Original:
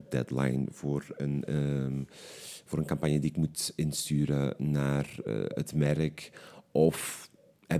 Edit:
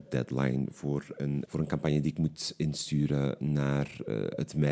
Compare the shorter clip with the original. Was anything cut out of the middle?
yes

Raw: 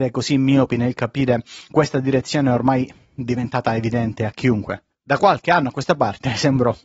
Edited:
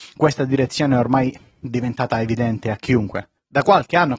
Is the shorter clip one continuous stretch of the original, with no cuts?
yes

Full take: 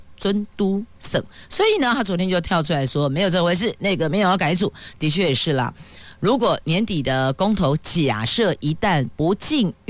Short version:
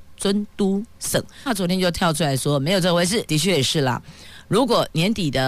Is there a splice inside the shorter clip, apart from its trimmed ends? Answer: yes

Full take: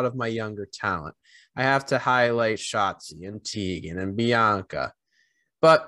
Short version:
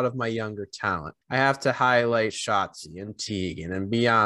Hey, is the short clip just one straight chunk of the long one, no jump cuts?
no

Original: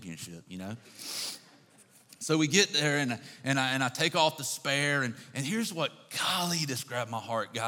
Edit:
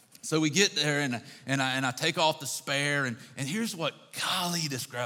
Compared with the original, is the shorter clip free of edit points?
yes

